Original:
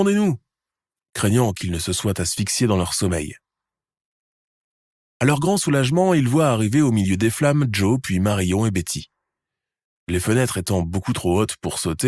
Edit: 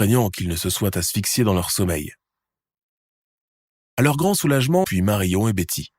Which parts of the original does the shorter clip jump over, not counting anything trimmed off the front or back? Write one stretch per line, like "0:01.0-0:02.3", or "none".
0:06.1-0:08.0

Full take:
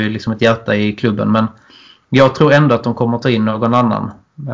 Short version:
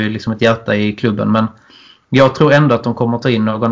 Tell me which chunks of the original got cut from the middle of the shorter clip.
none

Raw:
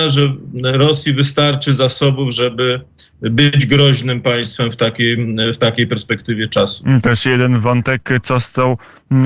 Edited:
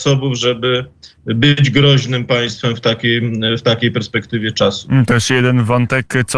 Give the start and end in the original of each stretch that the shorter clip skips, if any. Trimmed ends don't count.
none

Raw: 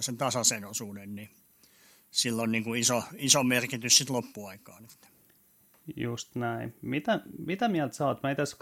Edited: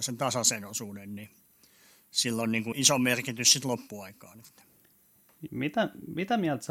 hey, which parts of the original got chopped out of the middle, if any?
0:02.7-0:03.2
0:05.9-0:06.8

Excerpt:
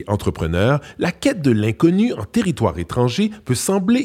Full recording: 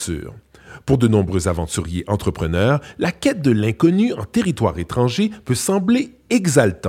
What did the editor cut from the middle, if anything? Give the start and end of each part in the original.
none

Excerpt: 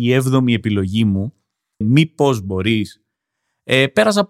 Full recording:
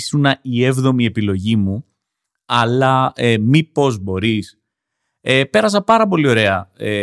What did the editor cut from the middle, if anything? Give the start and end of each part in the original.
0:02.3-0:03.4

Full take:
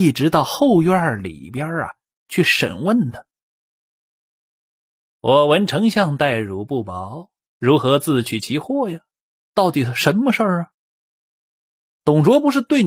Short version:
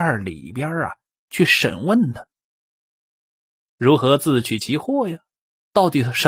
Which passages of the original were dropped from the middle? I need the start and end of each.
0:04.6-0:07.4

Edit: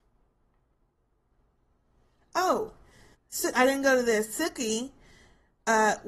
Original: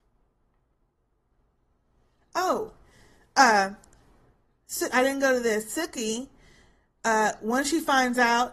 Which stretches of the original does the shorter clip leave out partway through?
0:03.1-0:04.5

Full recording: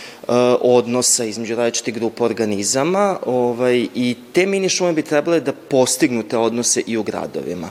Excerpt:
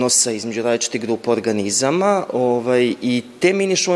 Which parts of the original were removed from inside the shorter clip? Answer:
none

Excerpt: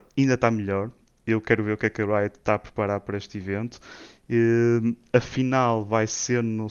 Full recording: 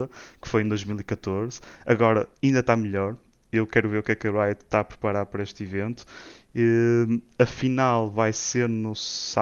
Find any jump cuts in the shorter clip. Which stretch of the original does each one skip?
none

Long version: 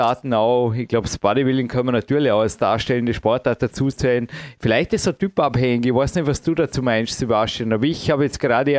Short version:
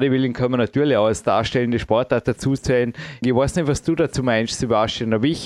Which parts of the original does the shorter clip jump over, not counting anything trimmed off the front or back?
0:04.6-0:05.8

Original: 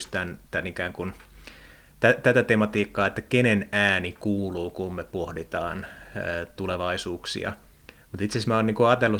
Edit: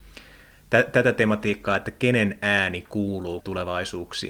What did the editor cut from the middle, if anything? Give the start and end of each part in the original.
0:04.7-0:06.5

